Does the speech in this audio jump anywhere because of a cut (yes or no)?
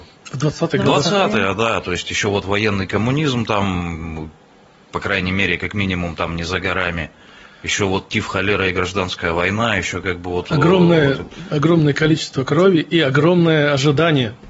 no